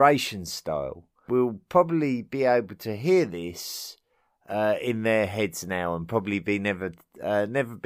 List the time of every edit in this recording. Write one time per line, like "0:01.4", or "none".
none